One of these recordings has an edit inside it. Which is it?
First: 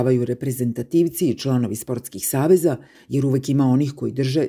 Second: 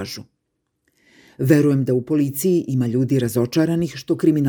first; 1 cut; at 2.9 s

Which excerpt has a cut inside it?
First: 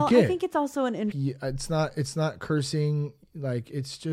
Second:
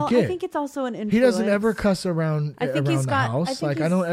first; 1 cut; at 1.1 s

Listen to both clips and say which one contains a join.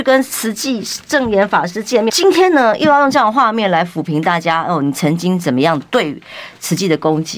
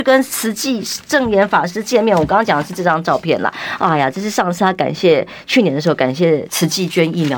first; 1 cut; at 2.1 s

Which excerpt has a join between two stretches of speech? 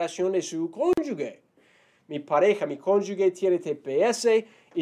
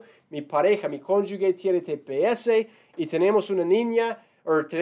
first; 1 cut; at 2.0 s

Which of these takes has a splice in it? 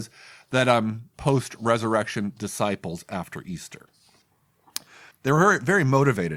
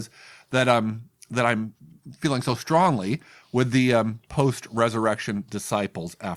first; 2 cuts; at 1.1 s, 5.1 s

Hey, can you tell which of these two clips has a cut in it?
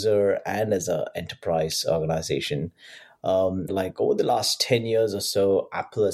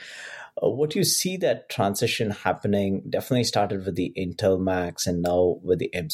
first; 1 cut; at 3.7 s

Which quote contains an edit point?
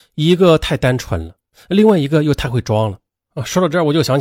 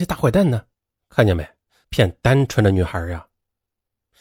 second; 1 cut; at 1.8 s

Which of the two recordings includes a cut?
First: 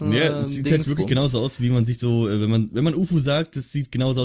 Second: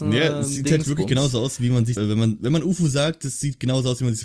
second; 1 cut; at 2.0 s

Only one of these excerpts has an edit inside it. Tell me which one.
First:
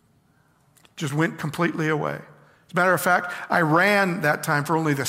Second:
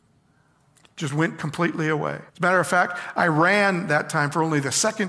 second; 1 cut; at 2.3 s

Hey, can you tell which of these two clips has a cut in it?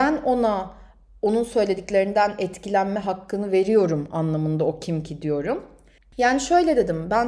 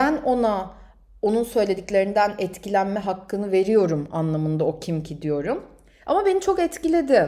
first; 1 cut; at 6.0 s

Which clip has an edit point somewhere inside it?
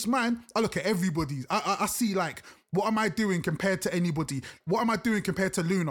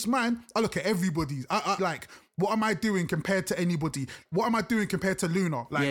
second; 1 cut; at 1.8 s

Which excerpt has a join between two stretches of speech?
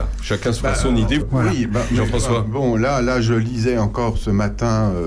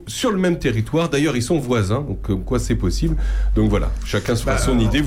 first; 1 cut; at 1.2 s

